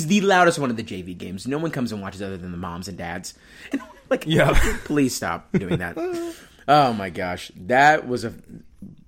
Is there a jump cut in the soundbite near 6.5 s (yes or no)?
no